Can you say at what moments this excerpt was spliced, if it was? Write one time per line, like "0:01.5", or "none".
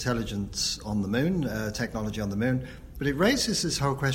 0:02.9